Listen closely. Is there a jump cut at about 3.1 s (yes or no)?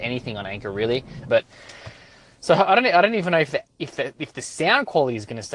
no